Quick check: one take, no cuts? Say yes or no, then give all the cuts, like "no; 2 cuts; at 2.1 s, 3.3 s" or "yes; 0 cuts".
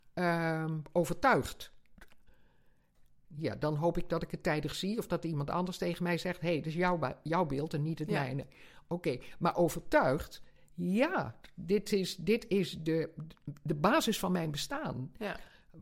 no; 1 cut; at 3.2 s